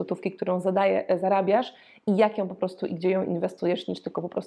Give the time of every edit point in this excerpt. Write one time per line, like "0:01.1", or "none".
none